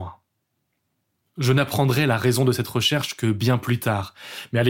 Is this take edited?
no; 0 cuts

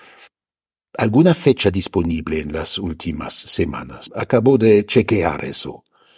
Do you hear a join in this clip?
no; 0 cuts

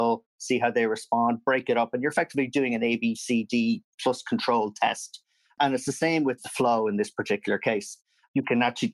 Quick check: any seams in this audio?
no; 0 cuts

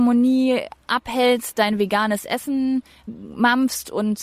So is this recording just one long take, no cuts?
no; 1 cut; at 3.1 s

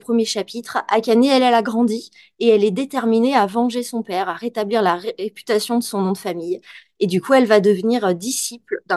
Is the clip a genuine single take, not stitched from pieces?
yes; 0 cuts

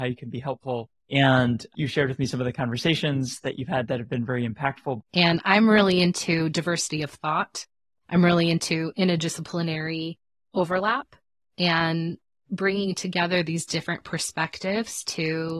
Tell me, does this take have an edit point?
yes; 2 cuts; at 1.0 s, 5.0 s

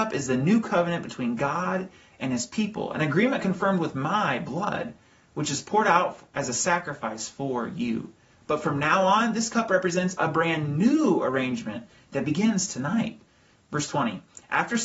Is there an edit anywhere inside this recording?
yes; 2 cuts; at 8.3 s, 13.6 s

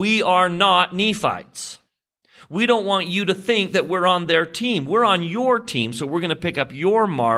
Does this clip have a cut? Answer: no; 0 cuts

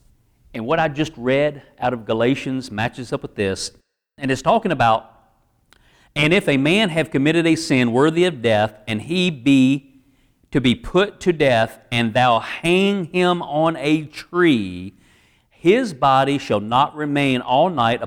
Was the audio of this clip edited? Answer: no; 0 cuts

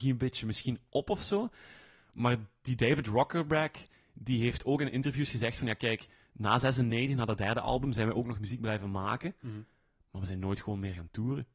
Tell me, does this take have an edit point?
no; 0 cuts

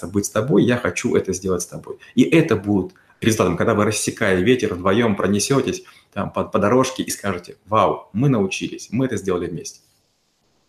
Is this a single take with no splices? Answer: yes; 0 cuts

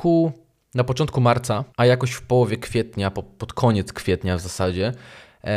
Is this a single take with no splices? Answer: no; 1 cut; at 1.7 s

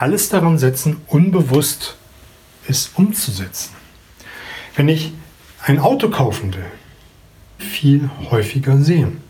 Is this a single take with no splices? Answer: no; 1 cut; at 7.6 s

